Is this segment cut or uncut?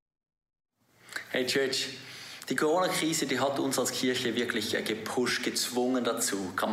uncut